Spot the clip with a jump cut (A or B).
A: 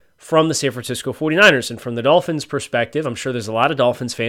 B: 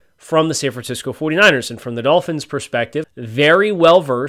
B